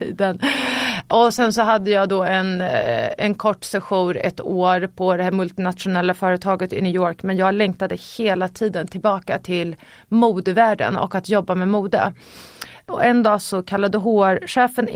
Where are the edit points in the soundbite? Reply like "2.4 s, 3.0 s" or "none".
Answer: none